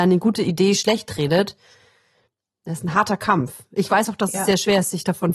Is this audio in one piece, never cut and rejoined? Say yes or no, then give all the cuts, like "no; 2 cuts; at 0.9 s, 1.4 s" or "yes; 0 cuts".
yes; 0 cuts